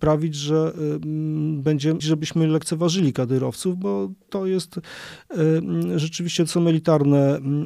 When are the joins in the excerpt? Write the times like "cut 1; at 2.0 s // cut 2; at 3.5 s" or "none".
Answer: cut 1; at 2.0 s